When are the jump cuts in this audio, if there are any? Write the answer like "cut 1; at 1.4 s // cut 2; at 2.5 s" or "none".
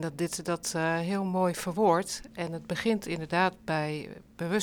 none